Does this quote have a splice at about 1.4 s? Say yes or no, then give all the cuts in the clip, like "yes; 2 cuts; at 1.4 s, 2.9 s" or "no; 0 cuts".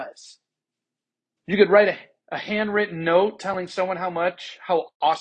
yes; 1 cut; at 1.4 s